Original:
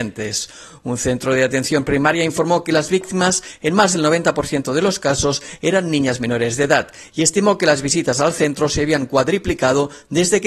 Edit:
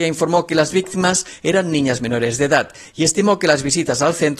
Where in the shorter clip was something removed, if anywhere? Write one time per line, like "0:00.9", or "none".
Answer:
0:01.4